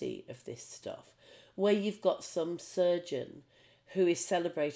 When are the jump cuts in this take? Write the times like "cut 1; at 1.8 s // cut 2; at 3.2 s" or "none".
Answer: none